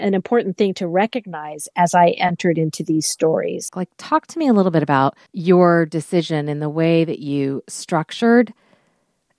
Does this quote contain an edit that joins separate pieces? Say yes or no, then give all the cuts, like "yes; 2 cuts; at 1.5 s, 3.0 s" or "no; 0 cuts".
yes; 2 cuts; at 3.7 s, 5.3 s